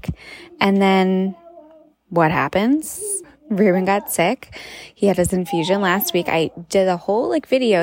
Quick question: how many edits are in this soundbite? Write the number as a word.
one